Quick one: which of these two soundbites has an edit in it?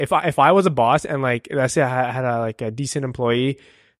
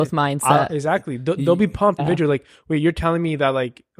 second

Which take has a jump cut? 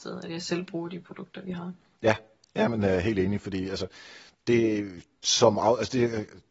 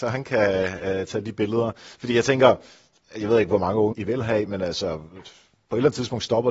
second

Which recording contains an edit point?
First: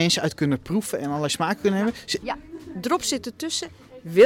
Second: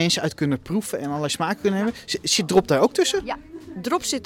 first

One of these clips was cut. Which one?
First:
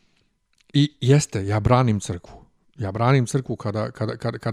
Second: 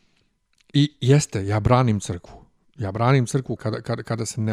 second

